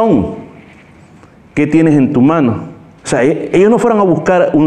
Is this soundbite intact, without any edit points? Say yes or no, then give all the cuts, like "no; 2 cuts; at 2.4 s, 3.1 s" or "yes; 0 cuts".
no; 1 cut; at 3.0 s